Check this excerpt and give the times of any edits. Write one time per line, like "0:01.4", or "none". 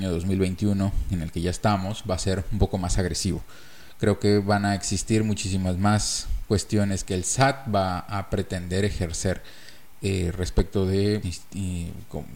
0:11.2